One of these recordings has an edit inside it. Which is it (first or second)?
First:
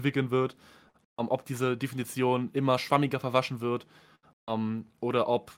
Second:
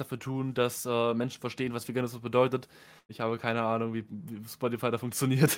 second